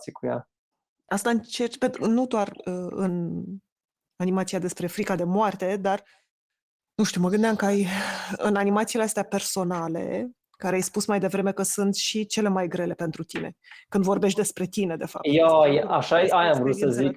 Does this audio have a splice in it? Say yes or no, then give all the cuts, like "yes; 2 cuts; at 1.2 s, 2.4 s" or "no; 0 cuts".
yes; 1 cut; at 8.4 s